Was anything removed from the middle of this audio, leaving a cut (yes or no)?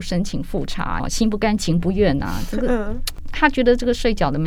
yes